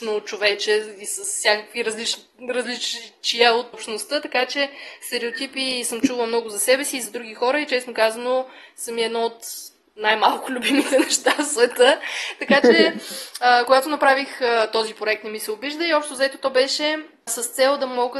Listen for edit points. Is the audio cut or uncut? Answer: cut